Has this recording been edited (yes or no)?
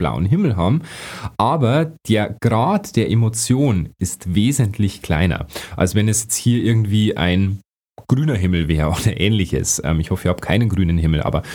no